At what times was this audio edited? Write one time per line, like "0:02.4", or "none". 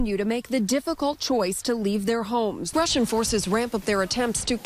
0:02.7